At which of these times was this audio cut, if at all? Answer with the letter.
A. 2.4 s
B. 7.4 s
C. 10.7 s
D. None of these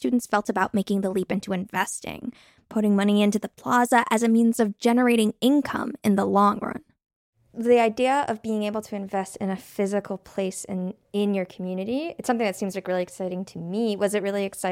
D